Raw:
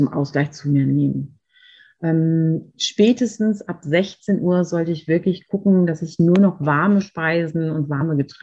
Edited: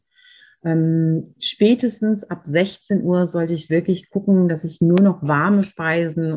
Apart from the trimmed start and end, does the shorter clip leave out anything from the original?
no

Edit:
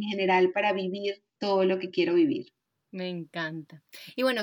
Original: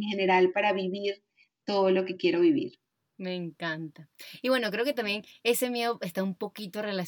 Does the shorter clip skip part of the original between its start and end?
yes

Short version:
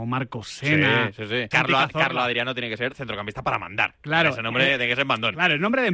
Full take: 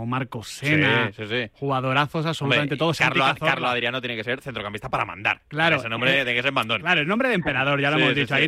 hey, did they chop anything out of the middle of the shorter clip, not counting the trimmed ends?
yes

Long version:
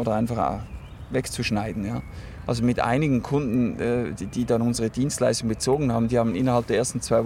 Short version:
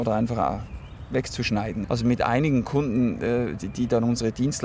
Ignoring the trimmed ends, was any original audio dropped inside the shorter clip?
yes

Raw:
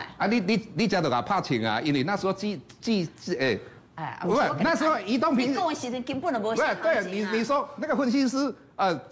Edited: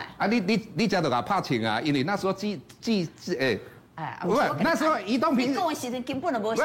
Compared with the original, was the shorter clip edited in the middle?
no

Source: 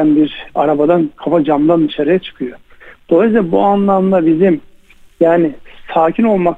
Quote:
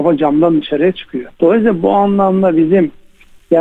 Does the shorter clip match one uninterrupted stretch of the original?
no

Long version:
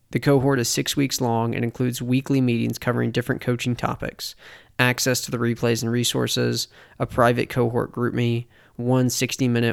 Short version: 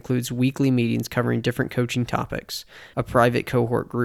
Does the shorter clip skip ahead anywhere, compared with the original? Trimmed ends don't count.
yes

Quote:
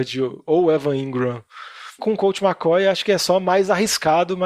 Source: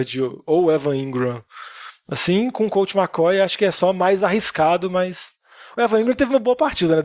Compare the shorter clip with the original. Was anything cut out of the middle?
yes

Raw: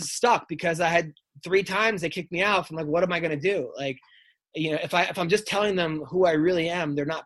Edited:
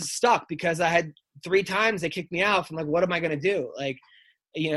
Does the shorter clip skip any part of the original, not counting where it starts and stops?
no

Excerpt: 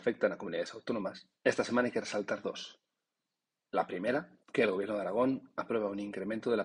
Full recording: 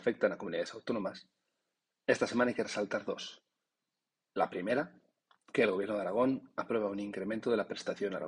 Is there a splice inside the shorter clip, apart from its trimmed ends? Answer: yes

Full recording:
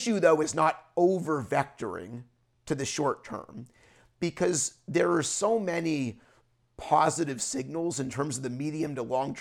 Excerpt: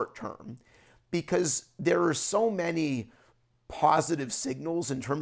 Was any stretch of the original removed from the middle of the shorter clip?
no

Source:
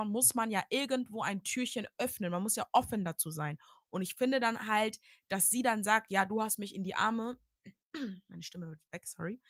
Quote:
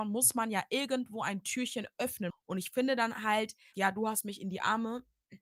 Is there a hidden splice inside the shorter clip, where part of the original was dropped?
yes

